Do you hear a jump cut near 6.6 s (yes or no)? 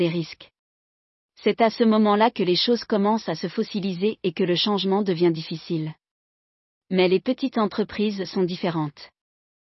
no